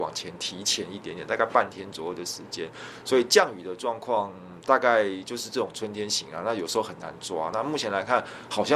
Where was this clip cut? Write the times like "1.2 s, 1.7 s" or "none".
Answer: none